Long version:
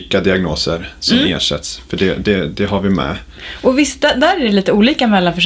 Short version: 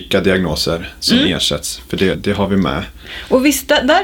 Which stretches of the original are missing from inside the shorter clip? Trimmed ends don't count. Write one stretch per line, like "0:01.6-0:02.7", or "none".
0:02.1-0:02.5

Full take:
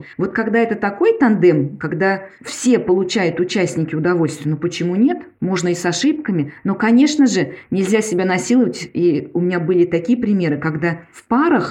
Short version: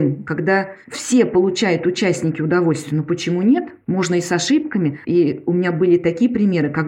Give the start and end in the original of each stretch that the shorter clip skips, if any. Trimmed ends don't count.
0:06.6-0:08.9

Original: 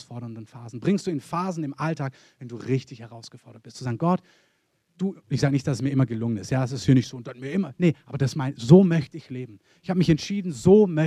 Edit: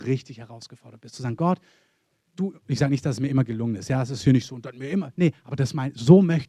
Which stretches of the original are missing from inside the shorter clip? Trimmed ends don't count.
none

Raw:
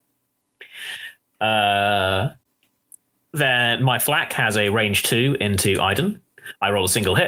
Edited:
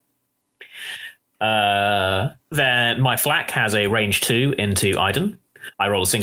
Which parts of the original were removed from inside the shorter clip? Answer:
0:02.4-0:03.2

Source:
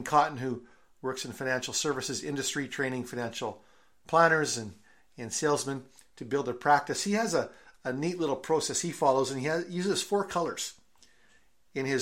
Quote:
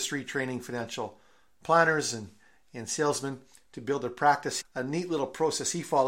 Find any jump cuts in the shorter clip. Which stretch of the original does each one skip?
0:07.0-0:07.7

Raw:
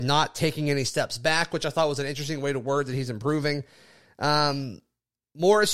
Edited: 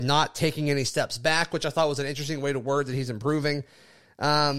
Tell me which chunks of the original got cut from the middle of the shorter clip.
none

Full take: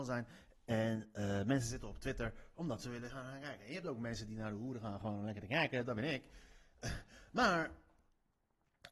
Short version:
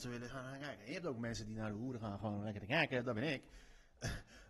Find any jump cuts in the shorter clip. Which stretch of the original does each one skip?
none

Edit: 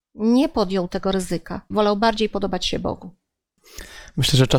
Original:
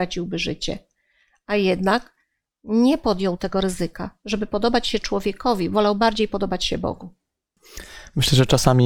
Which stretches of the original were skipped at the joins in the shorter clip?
0:04.2-0:05.7

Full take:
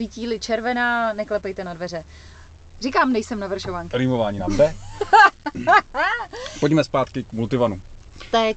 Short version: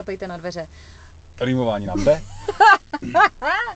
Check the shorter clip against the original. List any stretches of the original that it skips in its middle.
0:02.7-0:03.9

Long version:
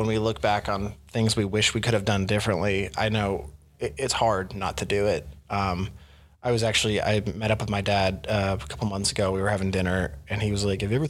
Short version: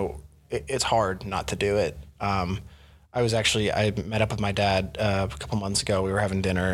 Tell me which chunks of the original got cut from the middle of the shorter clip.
none

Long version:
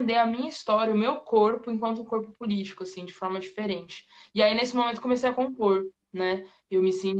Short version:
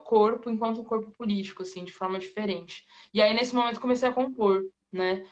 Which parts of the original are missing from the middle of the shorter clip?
none

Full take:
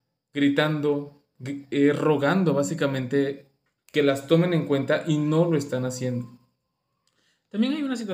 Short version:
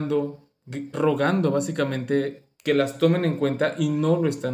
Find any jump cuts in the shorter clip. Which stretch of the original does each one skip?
0:01.7-0:02.0
0:03.6-0:03.8

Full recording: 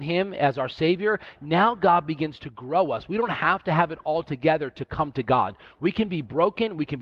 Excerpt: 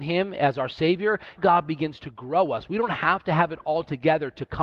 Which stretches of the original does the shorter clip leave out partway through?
0:01.4-0:01.8

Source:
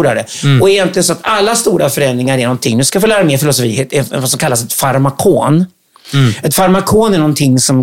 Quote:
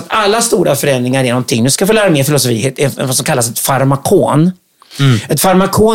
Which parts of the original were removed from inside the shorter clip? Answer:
none

